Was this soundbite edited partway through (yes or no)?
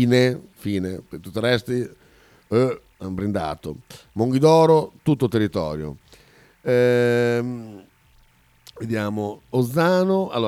no